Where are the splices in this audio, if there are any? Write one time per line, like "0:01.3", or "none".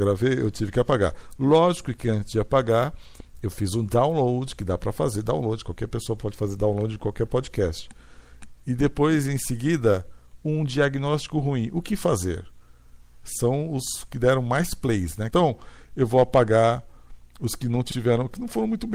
0:08.6
0:15.3

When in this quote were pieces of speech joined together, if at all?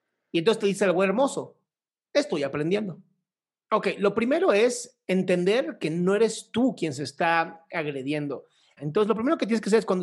0:03.6
0:08.8

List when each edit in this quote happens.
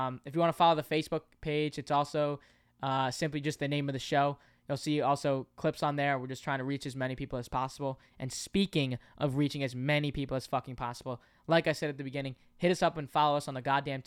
none

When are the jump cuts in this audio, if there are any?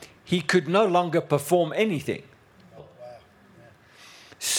0:02.8

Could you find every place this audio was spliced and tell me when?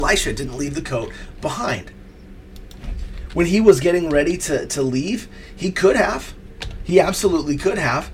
none

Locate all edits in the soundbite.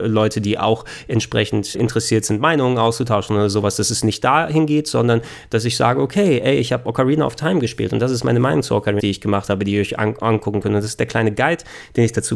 0:01.7
0:09.0

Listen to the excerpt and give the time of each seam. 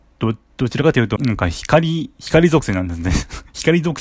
0:01.2

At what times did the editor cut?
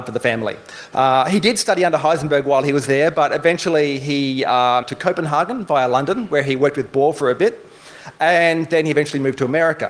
0:00.9
0:04.8

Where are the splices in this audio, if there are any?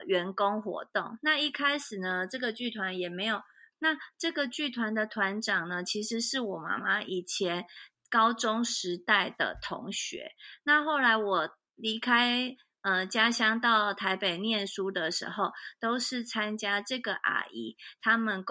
0:03.7

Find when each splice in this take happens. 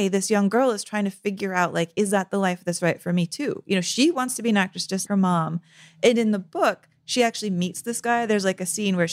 0:05.1

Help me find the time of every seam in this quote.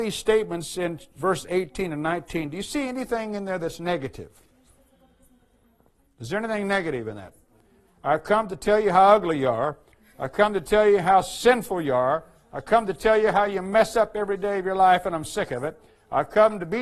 none

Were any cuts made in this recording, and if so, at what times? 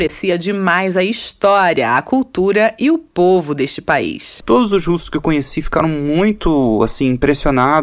0:04.4

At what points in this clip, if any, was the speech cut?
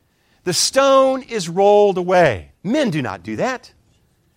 0:02.5

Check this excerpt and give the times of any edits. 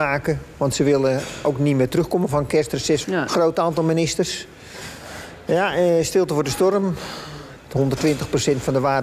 0:03.0
0:07.6

